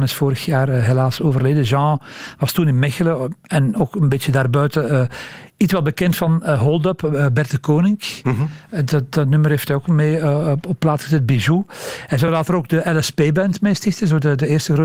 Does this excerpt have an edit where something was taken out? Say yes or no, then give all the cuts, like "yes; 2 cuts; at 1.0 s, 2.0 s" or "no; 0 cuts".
no; 0 cuts